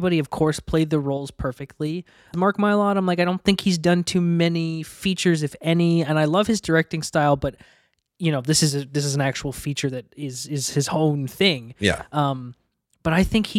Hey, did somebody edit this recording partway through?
yes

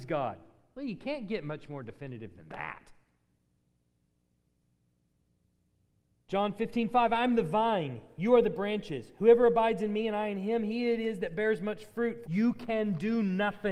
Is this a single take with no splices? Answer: no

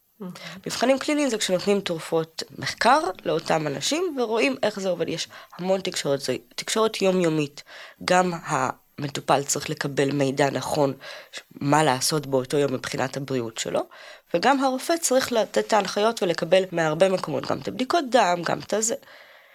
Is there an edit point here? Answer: no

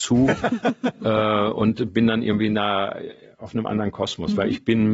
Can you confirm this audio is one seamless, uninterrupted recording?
yes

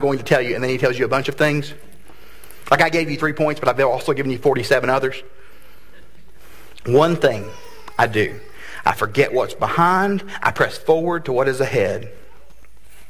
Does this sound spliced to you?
yes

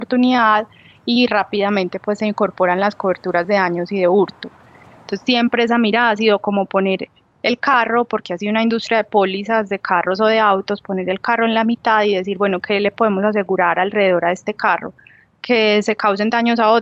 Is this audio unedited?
yes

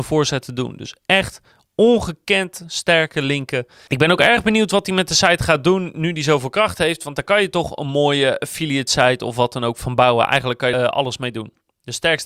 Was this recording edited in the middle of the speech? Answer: yes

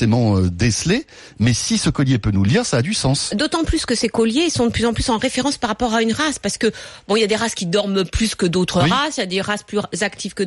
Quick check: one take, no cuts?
yes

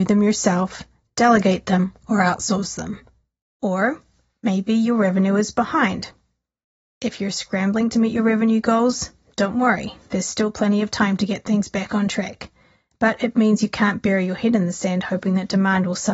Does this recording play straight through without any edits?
yes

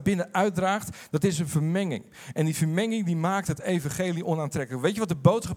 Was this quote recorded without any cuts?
yes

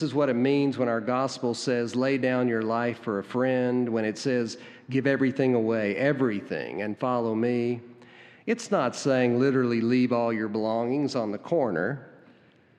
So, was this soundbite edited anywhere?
no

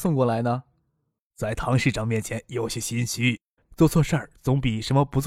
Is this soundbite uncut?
no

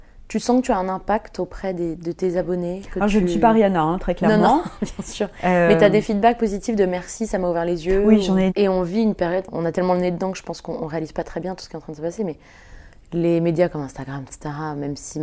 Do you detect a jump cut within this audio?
yes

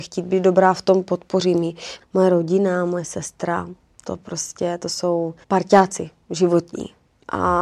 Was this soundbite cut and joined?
yes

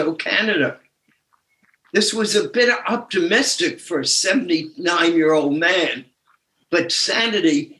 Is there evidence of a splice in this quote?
no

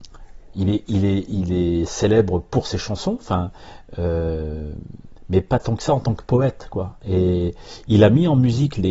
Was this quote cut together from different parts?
no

